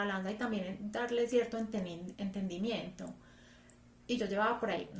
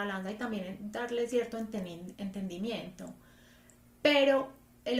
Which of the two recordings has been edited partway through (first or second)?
first